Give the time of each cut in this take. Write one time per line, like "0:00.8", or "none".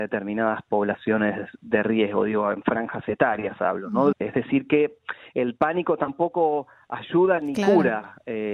0:04.1